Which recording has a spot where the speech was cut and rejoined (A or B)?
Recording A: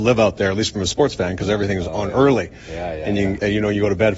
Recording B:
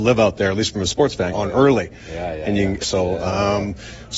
B